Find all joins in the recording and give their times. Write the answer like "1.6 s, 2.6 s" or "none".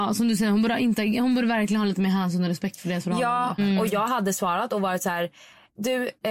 3.6 s